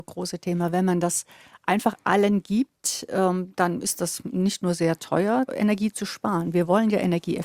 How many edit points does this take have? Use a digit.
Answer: 1